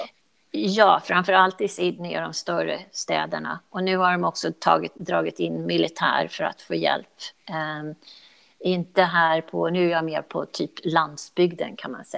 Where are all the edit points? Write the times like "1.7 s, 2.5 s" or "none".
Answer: none